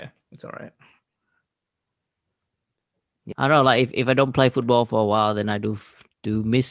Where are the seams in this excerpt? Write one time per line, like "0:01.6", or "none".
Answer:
0:03.3